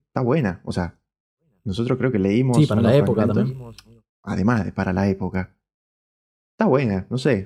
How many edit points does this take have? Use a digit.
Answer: 0